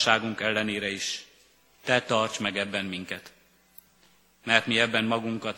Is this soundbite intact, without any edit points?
yes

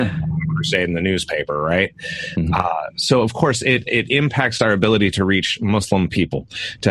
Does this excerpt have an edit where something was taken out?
no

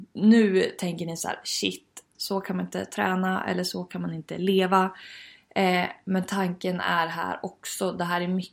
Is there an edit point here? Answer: yes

